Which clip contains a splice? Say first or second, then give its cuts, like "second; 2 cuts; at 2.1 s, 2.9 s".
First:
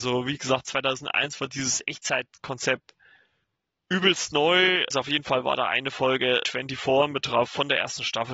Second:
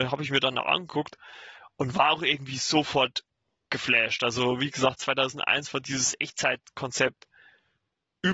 first; 2 cuts; at 4.9 s, 6.4 s